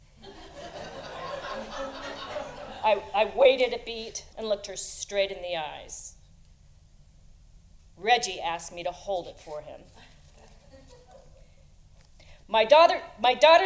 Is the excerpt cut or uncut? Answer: cut